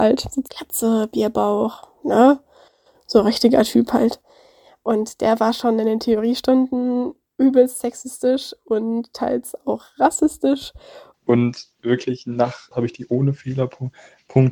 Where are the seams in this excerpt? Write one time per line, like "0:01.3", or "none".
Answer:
0:11.1
0:12.7